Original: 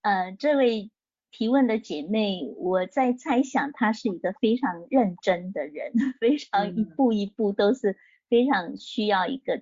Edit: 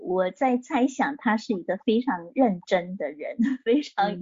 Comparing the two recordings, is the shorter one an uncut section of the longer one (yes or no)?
yes